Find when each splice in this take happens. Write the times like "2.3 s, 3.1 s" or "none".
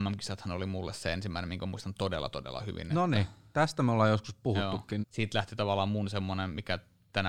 5.0 s

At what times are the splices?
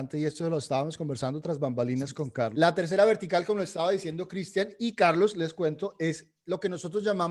2.5 s

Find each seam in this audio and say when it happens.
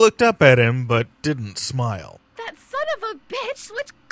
2.4 s

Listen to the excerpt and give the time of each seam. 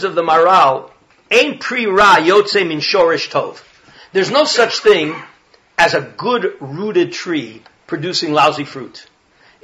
none

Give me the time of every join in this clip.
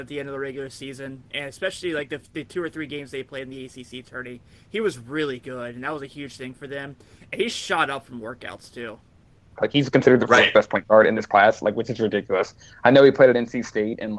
9.6 s

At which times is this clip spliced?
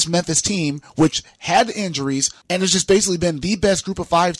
2.4 s

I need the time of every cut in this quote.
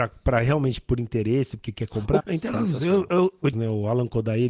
2.2 s, 3.5 s

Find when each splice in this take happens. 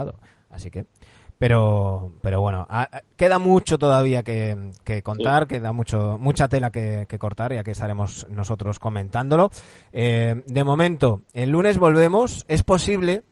none

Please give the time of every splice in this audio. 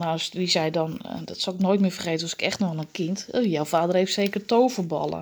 none

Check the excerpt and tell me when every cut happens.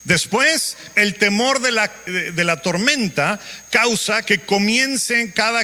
2.1 s

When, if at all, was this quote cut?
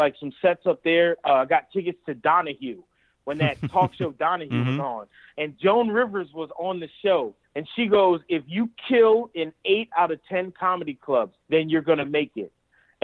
7.4 s, 11.4 s

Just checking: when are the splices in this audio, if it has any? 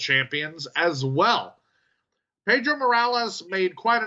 none

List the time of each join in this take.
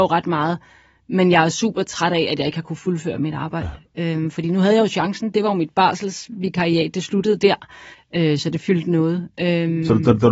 7.9 s

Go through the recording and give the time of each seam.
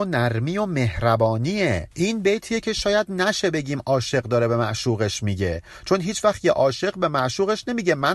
1.9 s

